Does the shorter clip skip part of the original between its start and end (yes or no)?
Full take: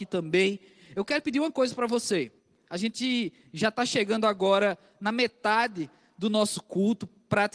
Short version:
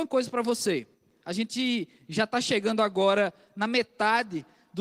no